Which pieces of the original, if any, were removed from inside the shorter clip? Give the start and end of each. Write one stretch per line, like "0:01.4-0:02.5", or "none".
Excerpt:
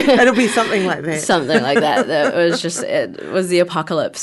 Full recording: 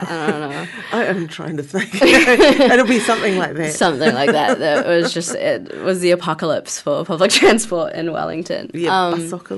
none